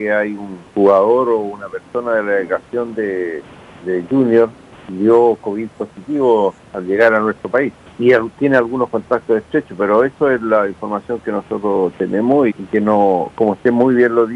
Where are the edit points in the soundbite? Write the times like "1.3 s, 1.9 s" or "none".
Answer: 12.5 s

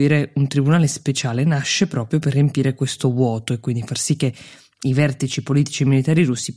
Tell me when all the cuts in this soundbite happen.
none

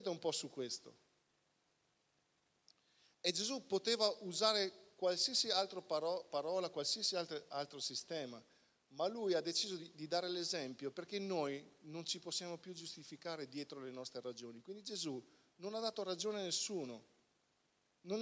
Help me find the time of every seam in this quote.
none

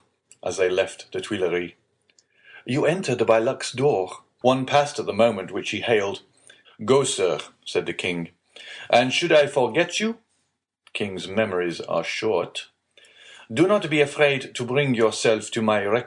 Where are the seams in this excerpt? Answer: 4.4 s, 6.6 s

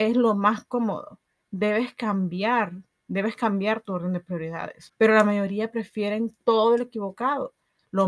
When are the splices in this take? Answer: 4.9 s

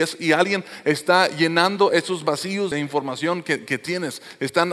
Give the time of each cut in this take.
2.7 s

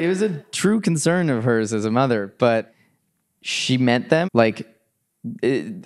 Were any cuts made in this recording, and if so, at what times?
4.2 s

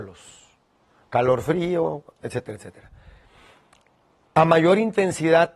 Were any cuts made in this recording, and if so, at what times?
none

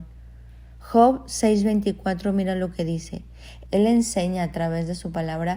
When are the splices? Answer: 3.6 s

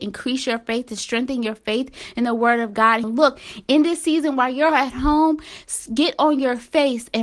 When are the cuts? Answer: 3.0 s

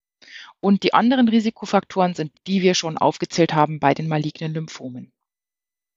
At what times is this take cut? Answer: 2.3 s

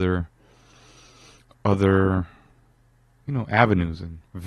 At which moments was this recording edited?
none

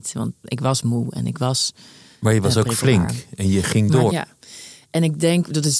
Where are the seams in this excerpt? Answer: 4.1 s

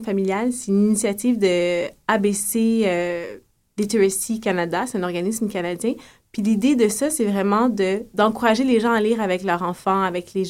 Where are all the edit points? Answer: none

